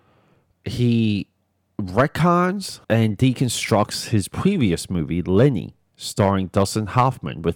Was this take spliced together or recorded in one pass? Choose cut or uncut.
cut